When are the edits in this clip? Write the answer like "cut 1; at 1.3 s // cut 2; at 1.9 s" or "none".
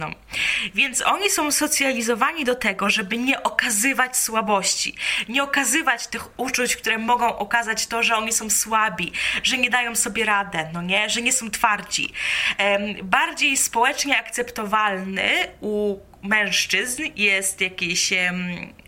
cut 1; at 6.1 s